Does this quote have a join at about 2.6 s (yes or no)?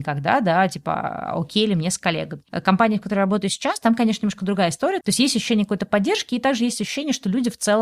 no